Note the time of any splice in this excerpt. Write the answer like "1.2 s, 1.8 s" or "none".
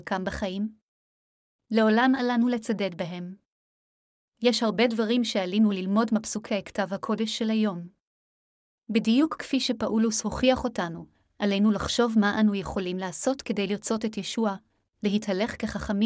none